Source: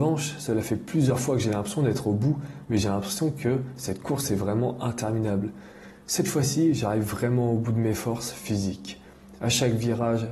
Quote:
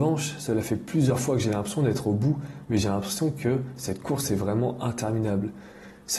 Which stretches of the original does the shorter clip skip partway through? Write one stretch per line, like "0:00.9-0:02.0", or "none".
none